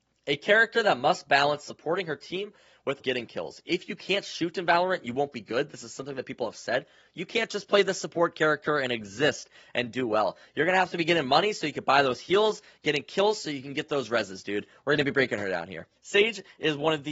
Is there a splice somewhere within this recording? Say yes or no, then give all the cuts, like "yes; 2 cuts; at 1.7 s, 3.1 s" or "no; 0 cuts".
yes; 2 cuts; at 3.0 s, 16.0 s